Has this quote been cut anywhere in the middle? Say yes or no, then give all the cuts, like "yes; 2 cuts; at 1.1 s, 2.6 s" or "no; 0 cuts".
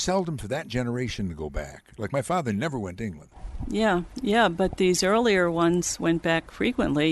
no; 0 cuts